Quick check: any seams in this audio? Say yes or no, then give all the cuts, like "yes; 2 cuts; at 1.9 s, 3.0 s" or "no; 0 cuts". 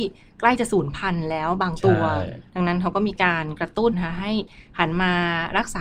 yes; 1 cut; at 3.9 s